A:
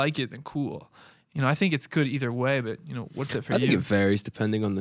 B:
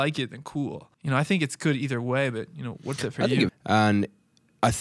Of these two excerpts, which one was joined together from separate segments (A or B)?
B